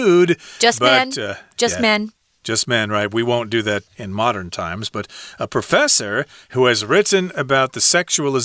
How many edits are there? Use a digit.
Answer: 1